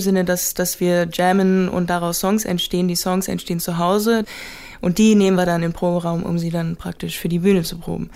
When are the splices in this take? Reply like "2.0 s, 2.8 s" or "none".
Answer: none